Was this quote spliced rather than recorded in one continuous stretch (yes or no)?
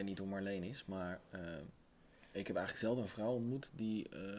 no